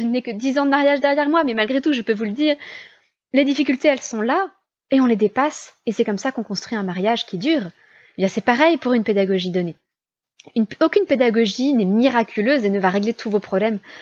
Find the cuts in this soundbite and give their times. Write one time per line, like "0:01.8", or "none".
none